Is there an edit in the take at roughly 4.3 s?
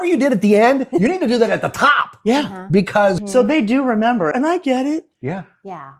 yes; 2 cuts; at 3.2 s, 4.3 s

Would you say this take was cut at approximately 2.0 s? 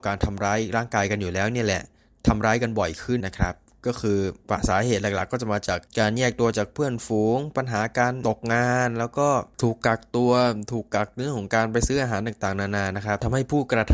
no; 2 cuts; at 3.2 s, 5.9 s

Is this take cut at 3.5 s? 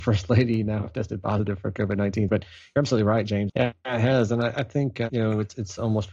yes; 2 cuts; at 2.3 s, 3.5 s

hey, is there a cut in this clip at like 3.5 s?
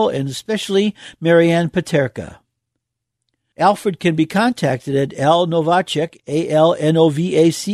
yes; 1 cut; at 3.5 s

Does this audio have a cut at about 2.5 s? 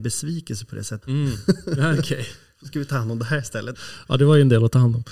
no; 2 cuts; at 1.0 s, 3.7 s

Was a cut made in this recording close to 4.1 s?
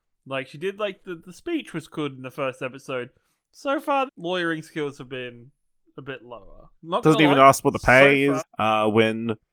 yes; 3 cuts; at 4.1 s, 6.7 s, 8.4 s

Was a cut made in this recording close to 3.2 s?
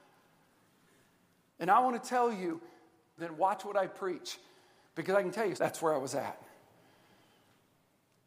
yes; 3 cuts; at 1.5 s, 3.2 s, 5.6 s

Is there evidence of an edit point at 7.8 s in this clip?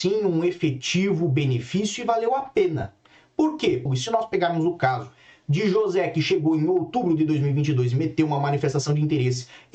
no; 1 cut; at 3.9 s

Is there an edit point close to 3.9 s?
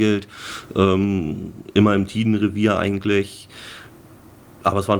no; 0 cuts

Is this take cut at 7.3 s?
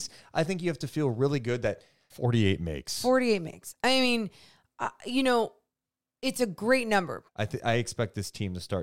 yes; 2 cuts; at 2.1 s, 7.3 s

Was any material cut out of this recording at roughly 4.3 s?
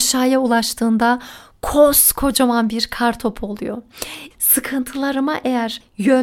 yes; 1 cut; at 4.3 s

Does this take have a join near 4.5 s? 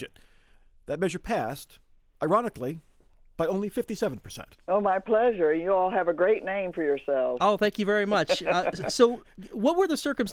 yes; 1 cut; at 4.5 s

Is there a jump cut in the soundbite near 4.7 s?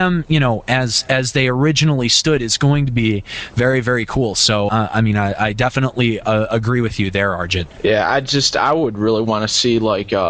yes; 1 cut; at 4.7 s

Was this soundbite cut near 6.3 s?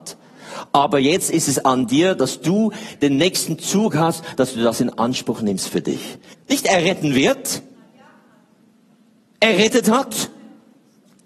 yes; 1 cut; at 6.3 s

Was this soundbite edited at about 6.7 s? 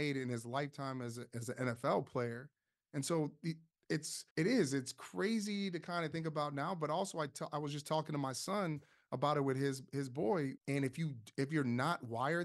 no; 2 cuts; at 4.3 s, 10.6 s

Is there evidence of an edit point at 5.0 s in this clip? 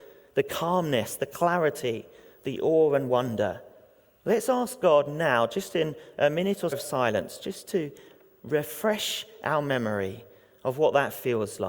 no; 1 cut; at 6.7 s

